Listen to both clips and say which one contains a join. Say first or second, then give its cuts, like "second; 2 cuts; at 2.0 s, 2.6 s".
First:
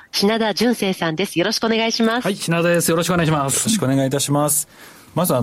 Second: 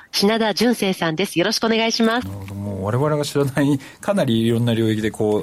second; 1 cut; at 2.2 s